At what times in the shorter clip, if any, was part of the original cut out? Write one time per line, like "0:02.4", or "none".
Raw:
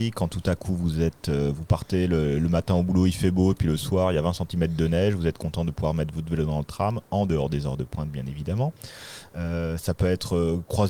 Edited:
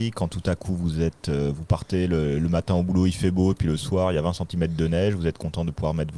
none